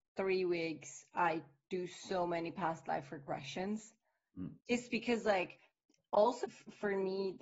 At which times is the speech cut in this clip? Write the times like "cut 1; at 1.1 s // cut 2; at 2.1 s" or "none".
cut 1; at 6.4 s